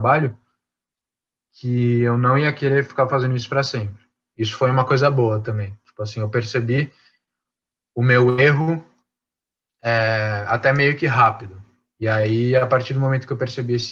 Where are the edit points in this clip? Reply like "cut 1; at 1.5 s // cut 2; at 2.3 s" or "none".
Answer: none